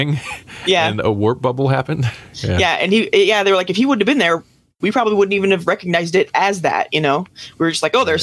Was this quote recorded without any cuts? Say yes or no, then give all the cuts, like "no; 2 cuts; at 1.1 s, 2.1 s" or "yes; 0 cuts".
yes; 0 cuts